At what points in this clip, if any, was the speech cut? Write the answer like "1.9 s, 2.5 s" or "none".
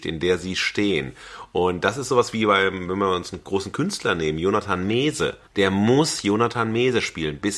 5.4 s